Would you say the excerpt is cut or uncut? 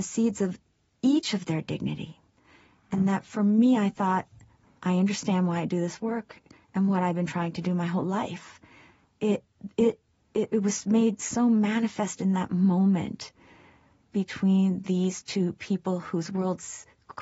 uncut